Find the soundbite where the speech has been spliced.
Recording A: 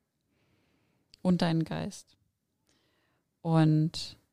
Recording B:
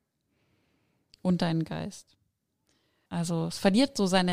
B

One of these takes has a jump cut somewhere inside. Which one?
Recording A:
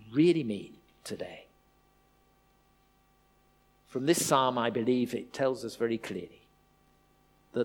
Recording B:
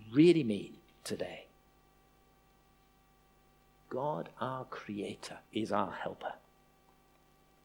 B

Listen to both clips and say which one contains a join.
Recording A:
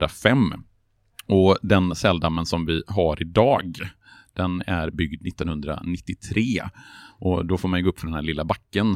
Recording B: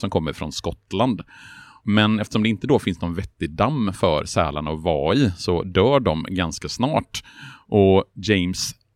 B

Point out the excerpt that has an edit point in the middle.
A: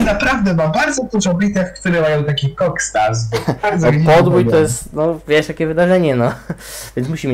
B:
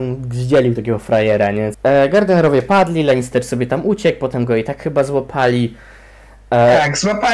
B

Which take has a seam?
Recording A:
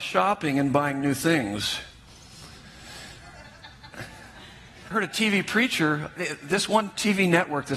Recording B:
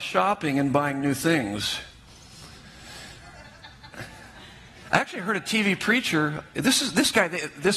A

